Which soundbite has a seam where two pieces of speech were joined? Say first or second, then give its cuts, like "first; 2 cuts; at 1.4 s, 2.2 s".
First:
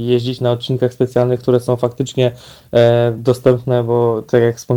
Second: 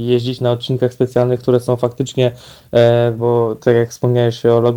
second; 1 cut; at 3.2 s